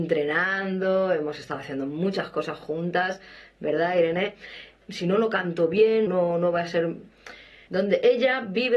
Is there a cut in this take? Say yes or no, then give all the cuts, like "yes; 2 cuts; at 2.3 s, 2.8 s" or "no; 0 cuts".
yes; 3 cuts; at 4.8 s, 6.1 s, 7.7 s